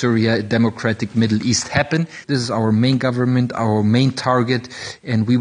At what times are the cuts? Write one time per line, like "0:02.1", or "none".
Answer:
0:02.2